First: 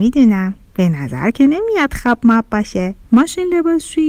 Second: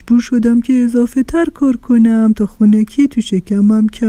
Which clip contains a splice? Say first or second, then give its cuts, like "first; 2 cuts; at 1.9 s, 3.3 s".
first; 1 cut; at 3.0 s